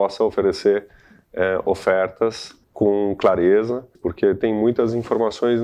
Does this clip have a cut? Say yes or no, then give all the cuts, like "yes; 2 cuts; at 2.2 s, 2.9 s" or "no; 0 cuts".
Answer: yes; 2 cuts; at 2.6 s, 3.9 s